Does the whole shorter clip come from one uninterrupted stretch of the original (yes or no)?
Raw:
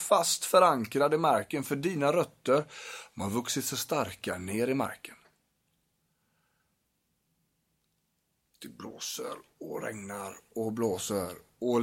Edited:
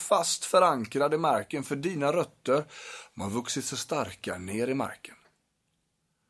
yes